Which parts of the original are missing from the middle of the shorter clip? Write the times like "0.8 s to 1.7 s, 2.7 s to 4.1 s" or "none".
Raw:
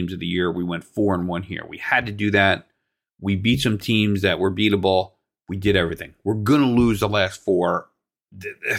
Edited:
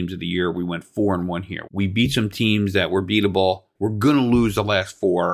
1.7 s to 3.2 s, 5.2 s to 6.2 s